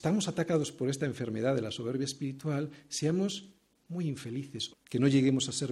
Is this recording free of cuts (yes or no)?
no